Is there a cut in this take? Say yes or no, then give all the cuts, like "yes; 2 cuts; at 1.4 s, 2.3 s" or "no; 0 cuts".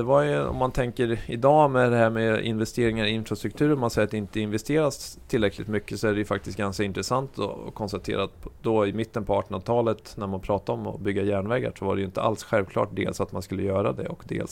no; 0 cuts